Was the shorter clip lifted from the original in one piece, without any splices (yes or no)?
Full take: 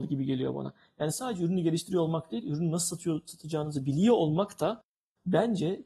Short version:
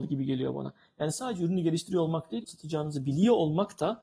no